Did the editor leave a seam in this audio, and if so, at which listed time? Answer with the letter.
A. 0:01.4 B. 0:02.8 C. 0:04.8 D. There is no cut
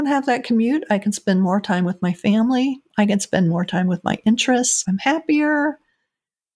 C